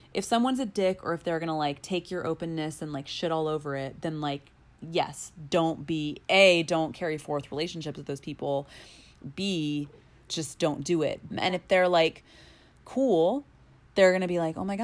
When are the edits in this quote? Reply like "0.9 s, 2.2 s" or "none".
10.3 s, 11.3 s